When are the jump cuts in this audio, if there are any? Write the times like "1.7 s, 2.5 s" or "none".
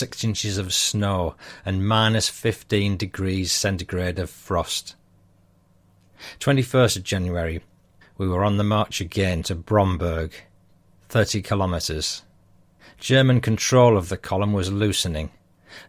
8.0 s